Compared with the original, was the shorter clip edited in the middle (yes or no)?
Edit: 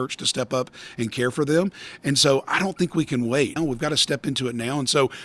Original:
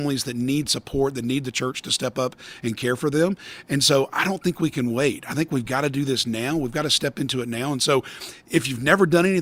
yes